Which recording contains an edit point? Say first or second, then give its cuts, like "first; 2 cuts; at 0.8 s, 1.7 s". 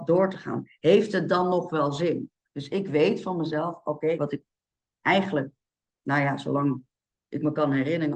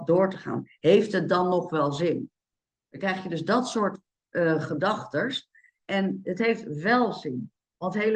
first; 2 cuts; at 2.5 s, 4.2 s